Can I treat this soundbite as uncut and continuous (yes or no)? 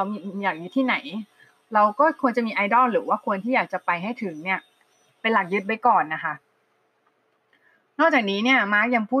yes